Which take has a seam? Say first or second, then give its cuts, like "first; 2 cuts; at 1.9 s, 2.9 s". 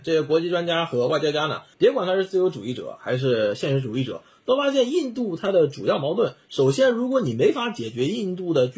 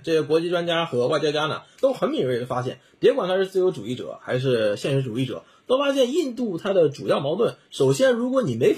first; 1 cut; at 1.7 s